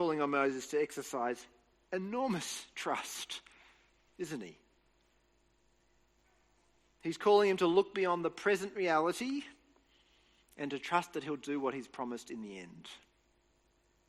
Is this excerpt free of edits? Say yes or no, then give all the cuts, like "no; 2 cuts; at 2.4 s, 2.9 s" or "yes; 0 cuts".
yes; 0 cuts